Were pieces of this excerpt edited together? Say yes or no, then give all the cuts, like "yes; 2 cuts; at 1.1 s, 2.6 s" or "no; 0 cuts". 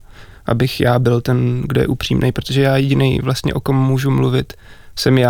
no; 0 cuts